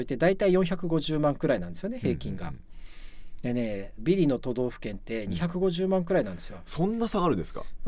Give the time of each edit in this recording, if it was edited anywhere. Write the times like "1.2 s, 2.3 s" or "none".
4.0 s

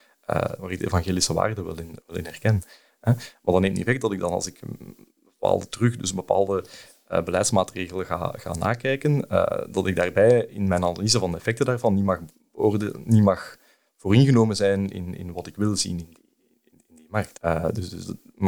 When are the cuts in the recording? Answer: 17.3 s

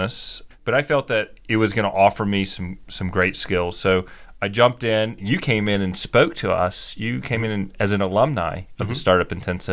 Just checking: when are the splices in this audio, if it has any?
5.2 s

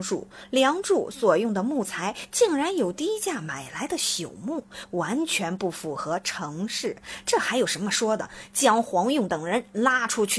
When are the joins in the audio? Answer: none

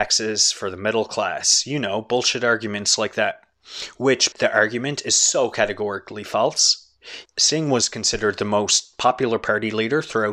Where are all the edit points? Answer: 4.3 s, 7.3 s

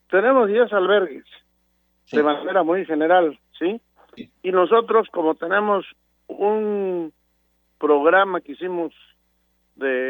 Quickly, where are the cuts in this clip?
none

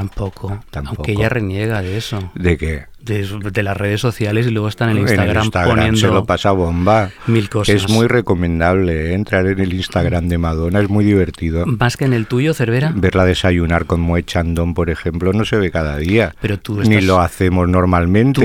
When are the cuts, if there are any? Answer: none

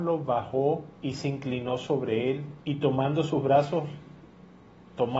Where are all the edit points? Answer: 0.9 s, 2.6 s

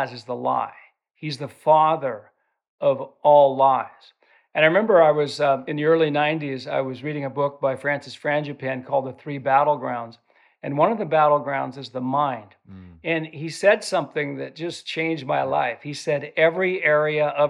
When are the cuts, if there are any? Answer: none

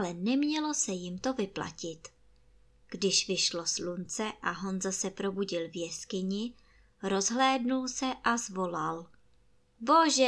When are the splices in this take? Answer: none

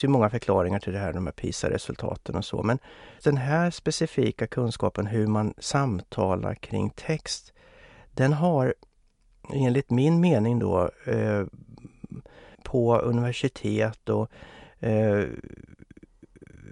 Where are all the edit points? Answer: 3.2 s, 12.5 s

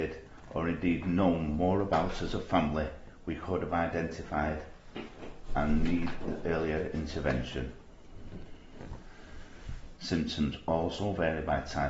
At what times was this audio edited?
10.0 s

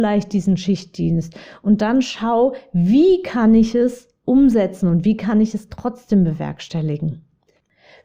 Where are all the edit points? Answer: none

